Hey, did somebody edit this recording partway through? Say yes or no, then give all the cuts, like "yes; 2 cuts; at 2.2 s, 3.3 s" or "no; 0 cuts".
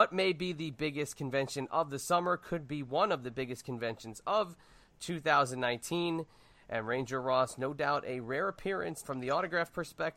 yes; 1 cut; at 9.0 s